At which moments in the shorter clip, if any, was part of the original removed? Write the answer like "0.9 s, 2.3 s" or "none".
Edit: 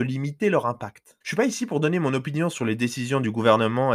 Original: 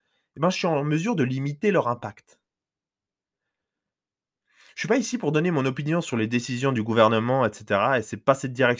1.2 s